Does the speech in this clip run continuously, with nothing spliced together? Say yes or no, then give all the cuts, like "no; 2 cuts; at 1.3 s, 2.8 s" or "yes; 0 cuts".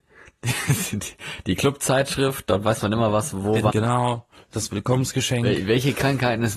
no; 1 cut; at 3.7 s